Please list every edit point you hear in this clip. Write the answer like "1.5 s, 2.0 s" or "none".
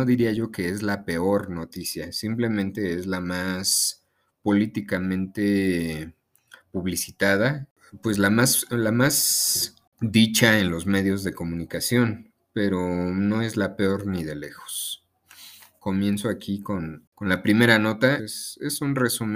18.2 s